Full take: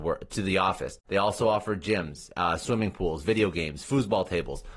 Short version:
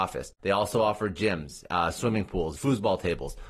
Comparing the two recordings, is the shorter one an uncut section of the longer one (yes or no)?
no